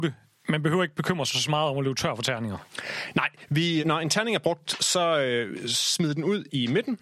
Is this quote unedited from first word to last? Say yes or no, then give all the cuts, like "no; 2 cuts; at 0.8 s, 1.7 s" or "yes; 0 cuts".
no; 1 cut; at 3.8 s